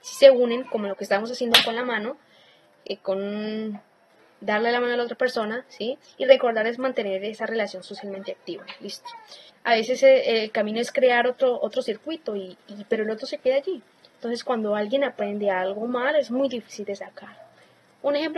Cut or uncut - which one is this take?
cut